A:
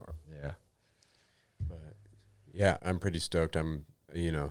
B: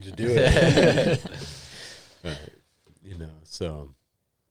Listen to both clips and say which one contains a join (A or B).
A